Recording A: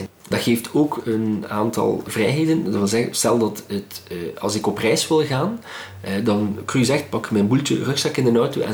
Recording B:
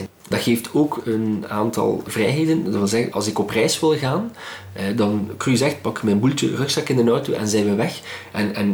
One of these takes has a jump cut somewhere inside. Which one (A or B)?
B